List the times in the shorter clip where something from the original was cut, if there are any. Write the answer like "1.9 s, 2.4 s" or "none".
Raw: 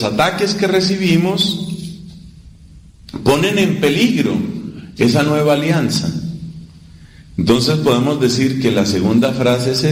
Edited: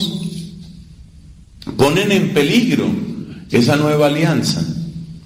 none